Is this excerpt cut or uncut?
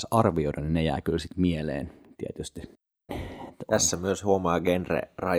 cut